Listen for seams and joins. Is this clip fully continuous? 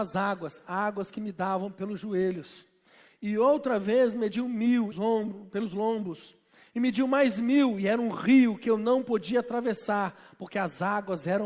no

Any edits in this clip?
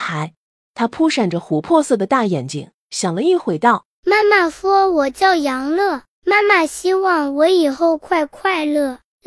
no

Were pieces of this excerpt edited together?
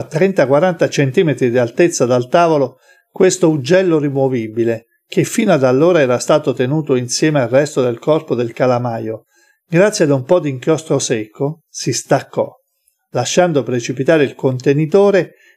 no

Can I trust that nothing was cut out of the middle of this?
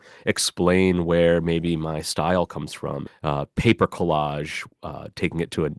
no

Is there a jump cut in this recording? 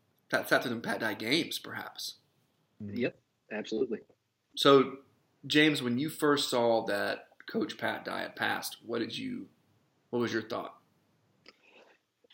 no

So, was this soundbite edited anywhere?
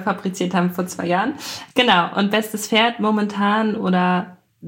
no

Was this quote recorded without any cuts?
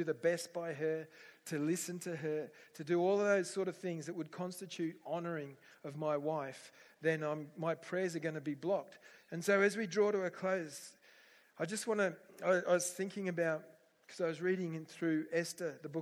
no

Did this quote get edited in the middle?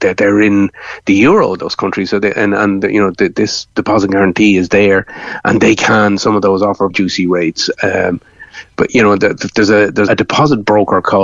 yes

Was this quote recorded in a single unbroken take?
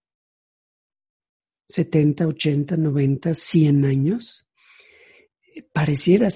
yes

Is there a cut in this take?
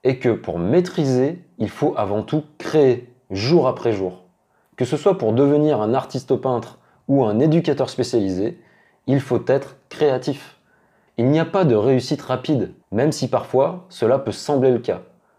yes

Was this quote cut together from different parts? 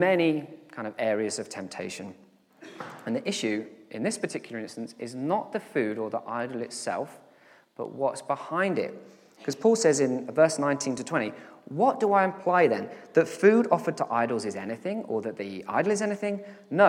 no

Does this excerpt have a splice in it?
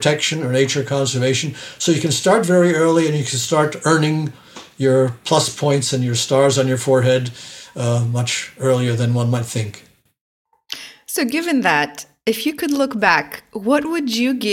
no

